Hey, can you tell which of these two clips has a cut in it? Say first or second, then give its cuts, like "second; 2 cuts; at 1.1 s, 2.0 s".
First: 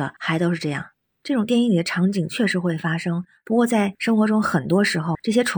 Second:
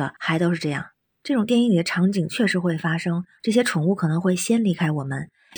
second; 1 cut; at 3.4 s